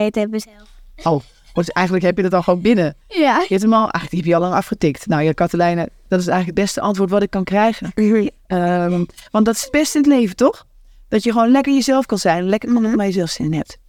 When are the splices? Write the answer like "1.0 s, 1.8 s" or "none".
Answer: none